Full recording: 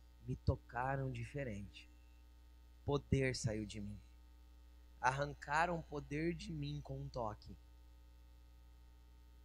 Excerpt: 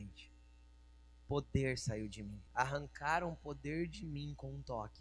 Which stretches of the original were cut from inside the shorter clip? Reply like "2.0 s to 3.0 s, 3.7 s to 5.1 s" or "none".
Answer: 4.0 s to 4.9 s